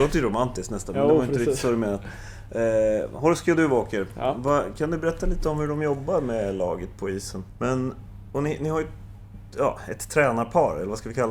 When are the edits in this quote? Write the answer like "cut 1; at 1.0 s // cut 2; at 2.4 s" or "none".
cut 1; at 7.6 s